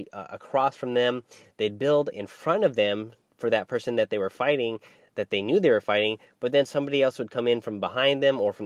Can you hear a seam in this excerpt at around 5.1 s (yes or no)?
no